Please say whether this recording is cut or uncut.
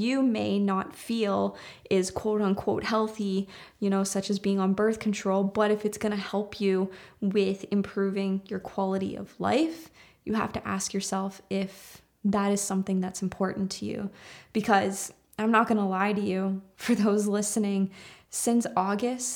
uncut